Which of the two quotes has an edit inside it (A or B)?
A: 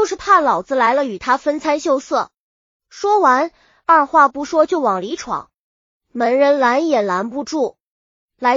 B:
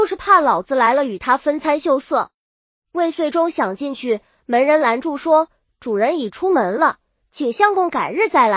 B